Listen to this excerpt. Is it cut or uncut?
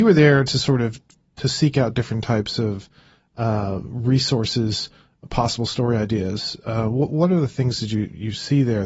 uncut